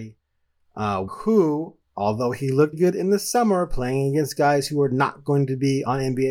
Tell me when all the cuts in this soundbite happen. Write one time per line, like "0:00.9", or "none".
0:01.1
0:02.7